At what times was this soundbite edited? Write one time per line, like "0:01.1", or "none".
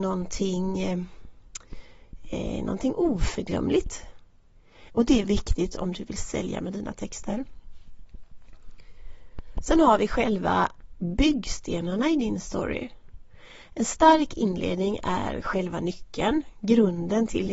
0:04.9